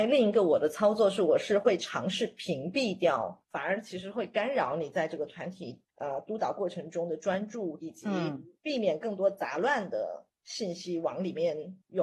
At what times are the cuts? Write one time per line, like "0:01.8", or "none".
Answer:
0:03.5
0:05.9
0:07.8